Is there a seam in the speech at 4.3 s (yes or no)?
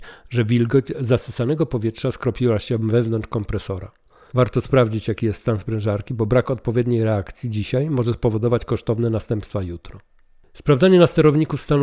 yes